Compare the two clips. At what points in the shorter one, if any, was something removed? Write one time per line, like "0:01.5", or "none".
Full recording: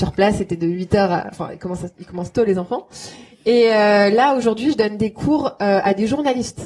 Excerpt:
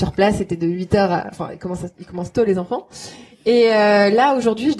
none